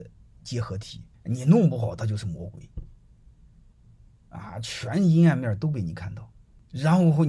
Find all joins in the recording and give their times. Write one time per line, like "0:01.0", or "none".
0:01.1